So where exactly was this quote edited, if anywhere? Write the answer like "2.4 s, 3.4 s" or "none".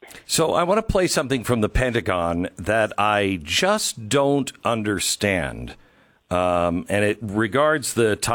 none